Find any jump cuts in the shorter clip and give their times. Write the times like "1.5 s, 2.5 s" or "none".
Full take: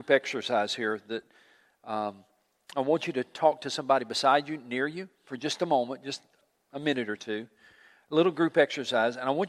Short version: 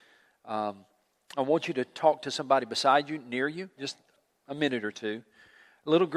3.8 s